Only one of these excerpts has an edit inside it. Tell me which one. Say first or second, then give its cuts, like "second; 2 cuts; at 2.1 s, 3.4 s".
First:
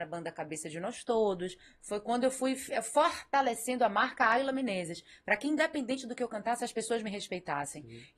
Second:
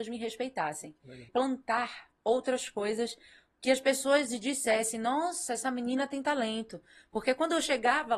second; 1 cut; at 1.3 s